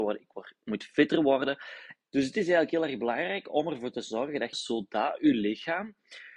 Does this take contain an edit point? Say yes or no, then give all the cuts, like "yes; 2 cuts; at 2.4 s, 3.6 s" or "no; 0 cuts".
yes; 2 cuts; at 2.1 s, 4.5 s